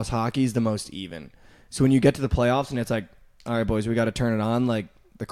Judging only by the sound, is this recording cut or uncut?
uncut